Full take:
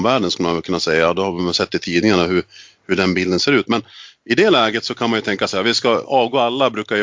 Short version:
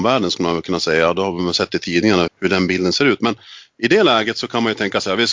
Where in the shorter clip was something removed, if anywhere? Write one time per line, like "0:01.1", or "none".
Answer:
0:02.3